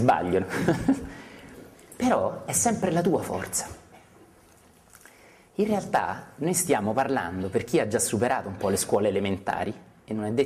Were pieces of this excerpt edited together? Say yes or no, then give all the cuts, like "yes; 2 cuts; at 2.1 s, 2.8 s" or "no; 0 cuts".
no; 0 cuts